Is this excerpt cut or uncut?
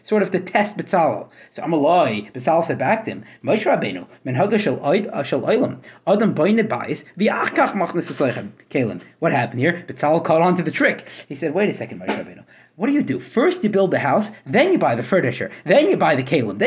uncut